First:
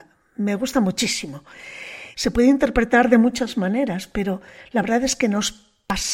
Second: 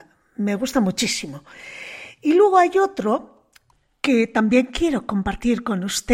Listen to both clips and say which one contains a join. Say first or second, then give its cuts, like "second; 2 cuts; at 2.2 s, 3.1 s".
first; 1 cut; at 2.1 s